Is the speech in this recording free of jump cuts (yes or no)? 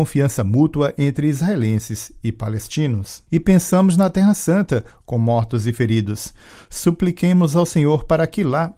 no